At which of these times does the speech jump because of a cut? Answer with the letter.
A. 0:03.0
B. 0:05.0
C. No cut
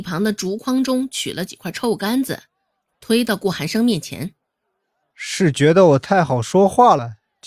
B